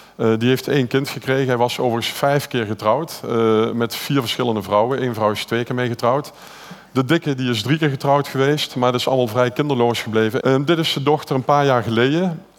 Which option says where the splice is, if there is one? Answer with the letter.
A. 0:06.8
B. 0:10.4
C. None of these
B